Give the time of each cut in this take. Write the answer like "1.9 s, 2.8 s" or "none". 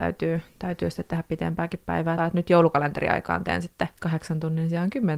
2.2 s